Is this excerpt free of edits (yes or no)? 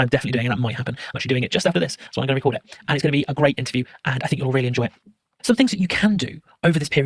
no